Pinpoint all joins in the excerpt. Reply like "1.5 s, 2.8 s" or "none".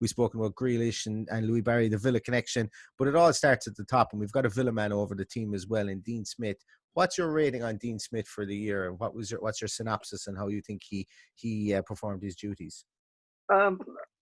none